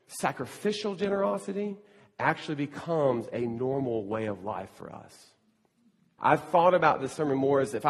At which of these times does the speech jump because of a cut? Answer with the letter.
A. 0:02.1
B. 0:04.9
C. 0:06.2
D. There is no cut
C